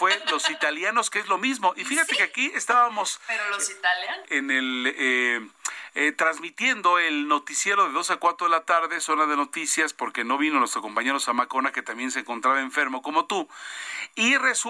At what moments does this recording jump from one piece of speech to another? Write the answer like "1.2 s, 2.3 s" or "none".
4.2 s

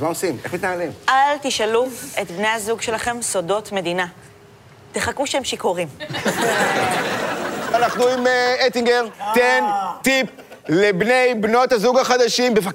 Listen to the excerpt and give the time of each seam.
none

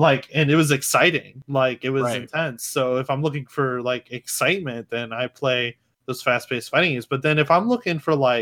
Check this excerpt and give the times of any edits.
none

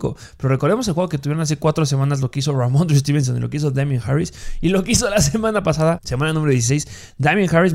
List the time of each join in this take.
6.0 s

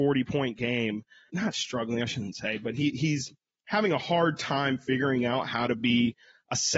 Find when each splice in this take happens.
1.3 s

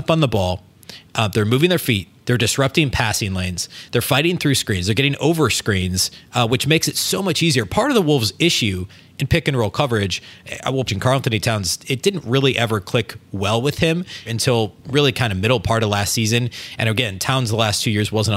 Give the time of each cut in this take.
10.9 s, 14.3 s

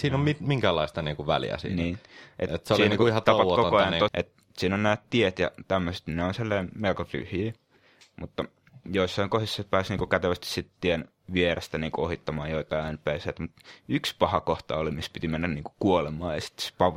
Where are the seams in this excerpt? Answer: 4.1 s

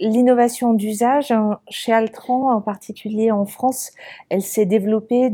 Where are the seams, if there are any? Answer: none

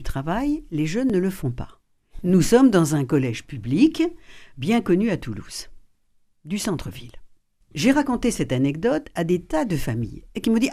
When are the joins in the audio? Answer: 2.2 s, 7.6 s

